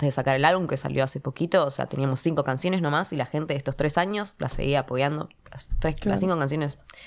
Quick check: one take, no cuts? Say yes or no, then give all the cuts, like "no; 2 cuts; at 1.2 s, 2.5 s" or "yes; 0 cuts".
yes; 0 cuts